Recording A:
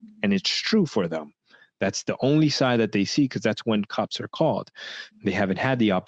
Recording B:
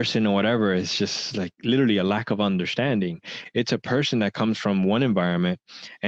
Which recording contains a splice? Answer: A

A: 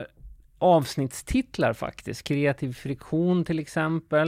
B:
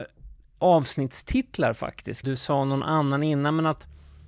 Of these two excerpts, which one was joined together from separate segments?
B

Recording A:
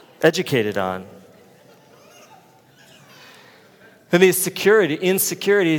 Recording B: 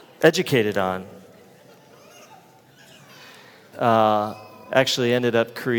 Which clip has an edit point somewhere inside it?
B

